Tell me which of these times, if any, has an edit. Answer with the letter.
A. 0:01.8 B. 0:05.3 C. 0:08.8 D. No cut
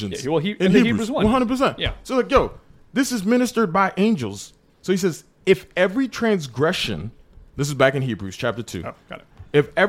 D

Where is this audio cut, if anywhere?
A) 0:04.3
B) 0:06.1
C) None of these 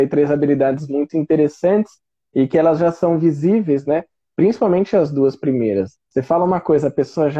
B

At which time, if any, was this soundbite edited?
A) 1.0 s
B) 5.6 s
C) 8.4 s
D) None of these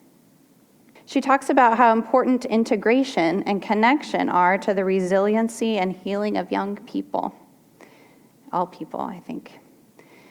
A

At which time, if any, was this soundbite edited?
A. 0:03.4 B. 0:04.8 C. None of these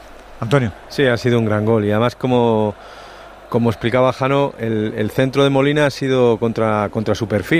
C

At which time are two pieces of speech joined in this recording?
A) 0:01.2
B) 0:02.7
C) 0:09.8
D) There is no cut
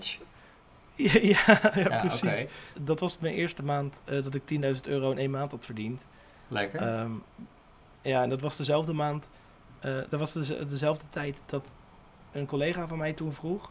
B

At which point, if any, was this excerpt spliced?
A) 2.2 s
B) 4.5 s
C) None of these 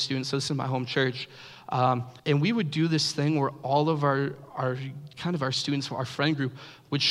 A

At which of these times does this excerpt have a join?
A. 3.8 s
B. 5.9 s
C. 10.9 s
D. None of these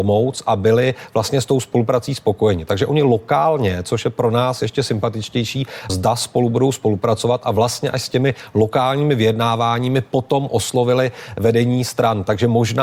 B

